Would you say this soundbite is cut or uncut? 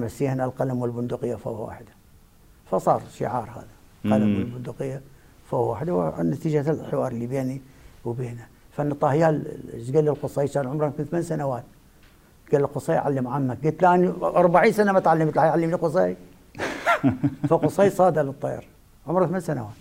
uncut